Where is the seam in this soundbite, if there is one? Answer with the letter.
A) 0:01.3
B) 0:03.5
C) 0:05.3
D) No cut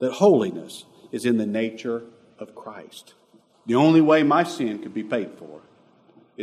B